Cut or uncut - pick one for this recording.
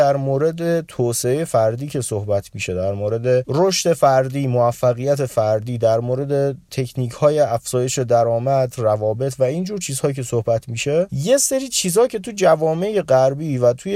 cut